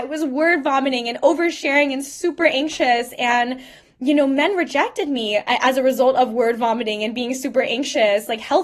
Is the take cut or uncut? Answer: uncut